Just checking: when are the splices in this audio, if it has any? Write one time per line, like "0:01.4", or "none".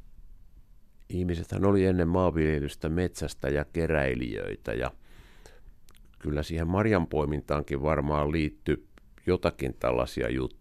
none